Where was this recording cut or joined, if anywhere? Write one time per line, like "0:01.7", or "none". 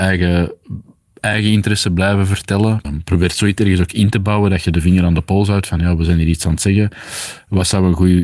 0:02.8